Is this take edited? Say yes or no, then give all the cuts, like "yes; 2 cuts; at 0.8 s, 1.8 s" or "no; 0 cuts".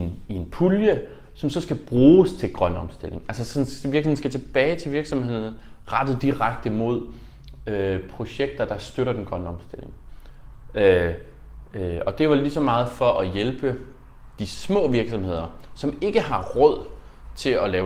no; 0 cuts